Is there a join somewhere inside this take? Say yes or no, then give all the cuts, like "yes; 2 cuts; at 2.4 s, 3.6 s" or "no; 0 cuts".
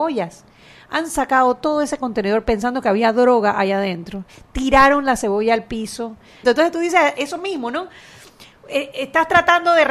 yes; 1 cut; at 6.4 s